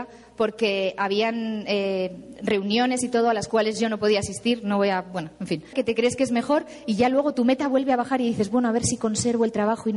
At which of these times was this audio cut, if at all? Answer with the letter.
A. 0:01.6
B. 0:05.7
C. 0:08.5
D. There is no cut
B